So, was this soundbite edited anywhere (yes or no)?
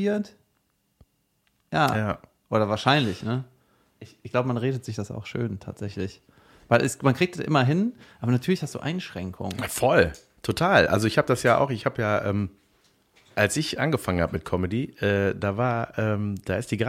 no